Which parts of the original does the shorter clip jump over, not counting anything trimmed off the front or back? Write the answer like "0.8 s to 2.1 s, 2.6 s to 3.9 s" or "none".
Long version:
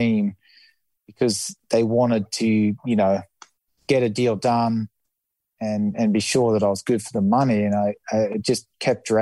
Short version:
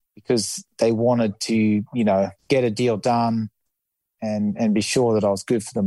3.3 s to 3.8 s

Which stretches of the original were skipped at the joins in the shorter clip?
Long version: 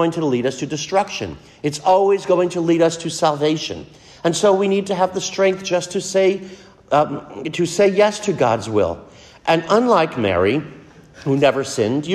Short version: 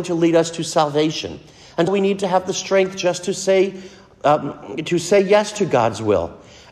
4.3 s to 4.5 s

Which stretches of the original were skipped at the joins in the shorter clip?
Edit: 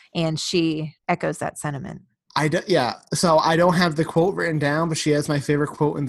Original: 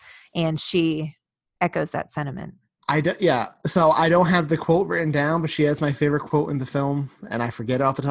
1.2 s to 1.5 s

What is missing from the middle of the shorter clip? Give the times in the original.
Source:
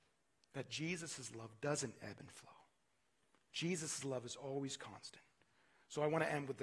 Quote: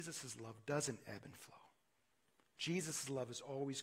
none

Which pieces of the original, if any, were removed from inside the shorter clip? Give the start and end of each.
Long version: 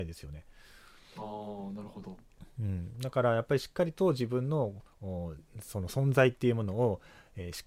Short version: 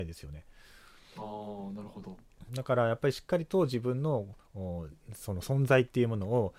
2.5 s to 2.9 s

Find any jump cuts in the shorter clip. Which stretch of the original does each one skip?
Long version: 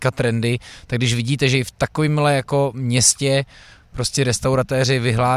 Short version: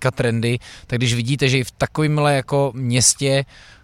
none

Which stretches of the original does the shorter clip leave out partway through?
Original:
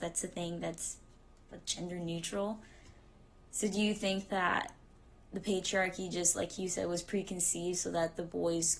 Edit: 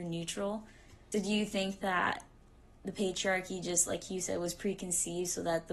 3.1 s to 3.6 s

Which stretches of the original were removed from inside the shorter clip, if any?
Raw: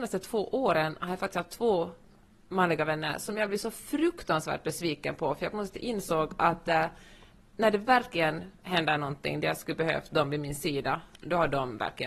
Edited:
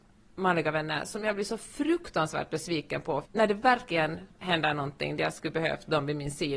5.4 s to 7.5 s

